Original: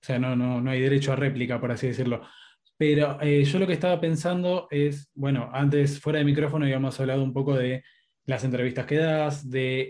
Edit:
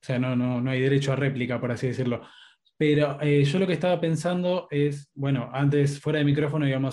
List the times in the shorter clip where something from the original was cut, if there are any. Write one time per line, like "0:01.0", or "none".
none